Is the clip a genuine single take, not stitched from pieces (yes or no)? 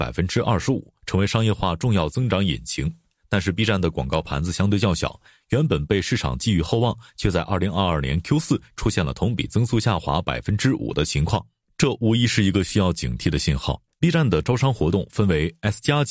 no